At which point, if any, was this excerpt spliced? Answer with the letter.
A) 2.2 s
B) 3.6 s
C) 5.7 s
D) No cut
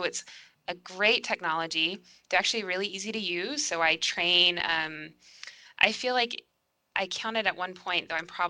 D